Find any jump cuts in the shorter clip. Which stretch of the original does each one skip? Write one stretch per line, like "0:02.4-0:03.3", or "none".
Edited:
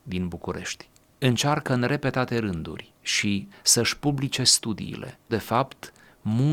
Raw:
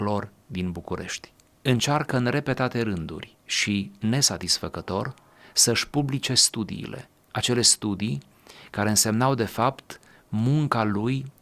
0:03.9-0:05.4
0:07.2-0:09.4

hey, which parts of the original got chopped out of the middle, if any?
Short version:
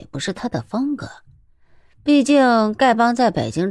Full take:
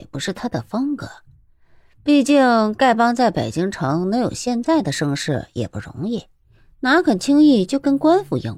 none

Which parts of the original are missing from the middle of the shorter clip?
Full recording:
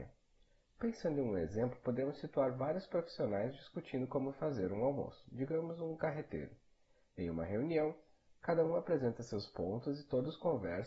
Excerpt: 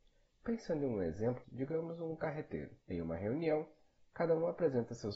0:01.8-0:05.2
0:06.6-0:07.1

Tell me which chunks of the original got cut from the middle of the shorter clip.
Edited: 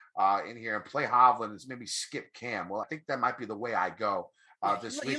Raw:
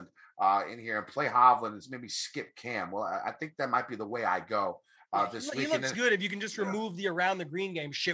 0:03.1-0:03.3

